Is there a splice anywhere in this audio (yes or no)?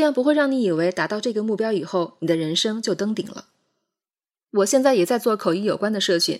yes